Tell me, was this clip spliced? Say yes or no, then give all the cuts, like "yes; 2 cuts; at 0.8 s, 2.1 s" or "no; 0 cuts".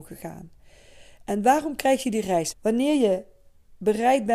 yes; 1 cut; at 2.5 s